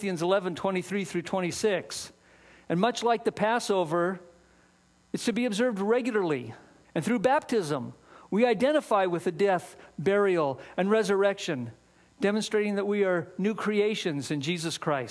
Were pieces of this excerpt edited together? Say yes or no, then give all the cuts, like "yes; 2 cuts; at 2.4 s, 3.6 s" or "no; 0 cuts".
yes; 1 cut; at 6.8 s